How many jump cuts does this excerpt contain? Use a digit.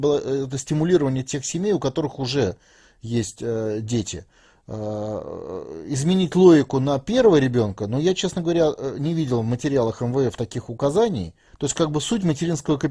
1